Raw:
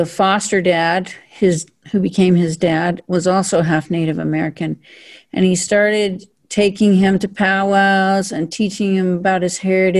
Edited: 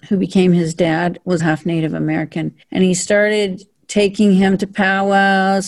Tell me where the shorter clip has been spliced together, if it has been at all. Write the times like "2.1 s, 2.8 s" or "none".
1.4 s, 2.6 s